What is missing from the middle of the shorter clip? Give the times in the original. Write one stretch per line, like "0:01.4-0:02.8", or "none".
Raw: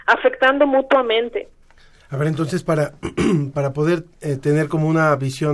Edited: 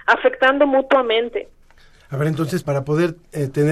0:02.6-0:03.5